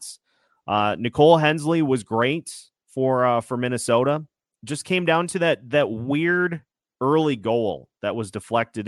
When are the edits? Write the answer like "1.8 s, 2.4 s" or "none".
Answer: none